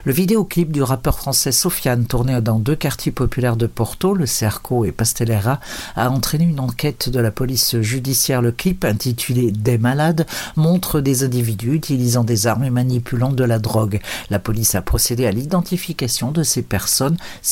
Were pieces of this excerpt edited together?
no; 0 cuts

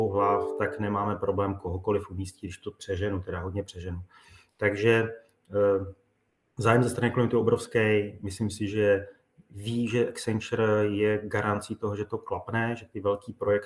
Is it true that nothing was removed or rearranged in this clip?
yes; 0 cuts

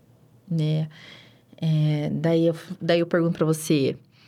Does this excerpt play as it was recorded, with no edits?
yes; 0 cuts

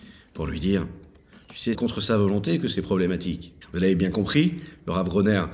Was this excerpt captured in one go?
no; 2 cuts; at 1.7 s, 3.6 s

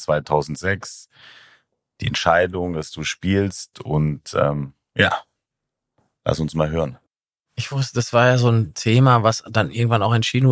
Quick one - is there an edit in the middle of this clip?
no; 0 cuts

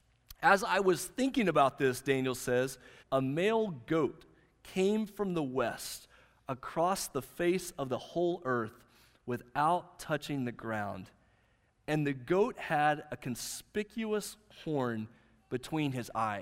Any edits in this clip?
yes; 1 cut; at 3.0 s

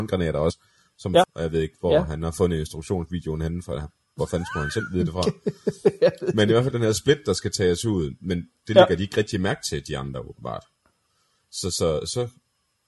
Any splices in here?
yes; 1 cut; at 1.2 s

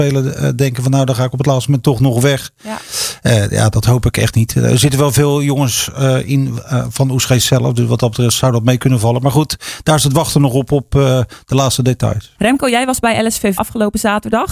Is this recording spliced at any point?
yes; 2 cuts; at 12.4 s, 13.6 s

